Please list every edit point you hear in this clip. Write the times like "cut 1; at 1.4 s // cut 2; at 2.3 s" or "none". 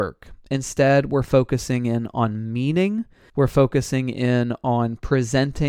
cut 1; at 3.3 s